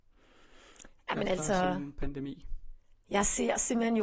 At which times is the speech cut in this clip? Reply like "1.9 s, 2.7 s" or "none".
none